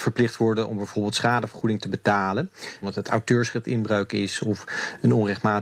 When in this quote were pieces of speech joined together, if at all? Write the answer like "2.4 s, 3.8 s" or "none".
2.8 s